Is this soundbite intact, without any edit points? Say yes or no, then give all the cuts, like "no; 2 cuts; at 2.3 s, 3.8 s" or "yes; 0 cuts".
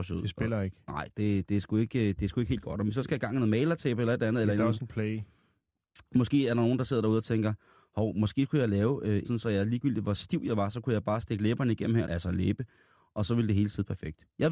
no; 2 cuts; at 9.2 s, 12.0 s